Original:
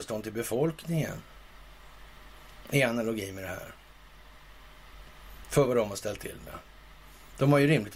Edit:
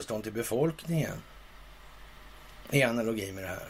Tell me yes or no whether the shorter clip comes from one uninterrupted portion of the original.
yes